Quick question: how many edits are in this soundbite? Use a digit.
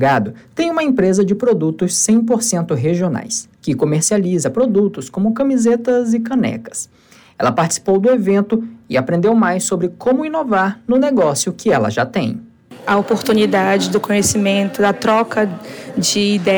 1